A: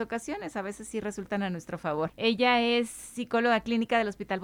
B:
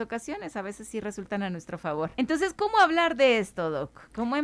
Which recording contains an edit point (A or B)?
A